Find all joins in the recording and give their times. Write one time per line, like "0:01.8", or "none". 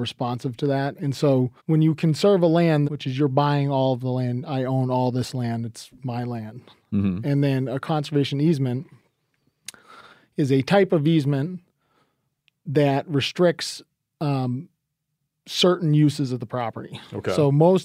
0:01.6
0:02.8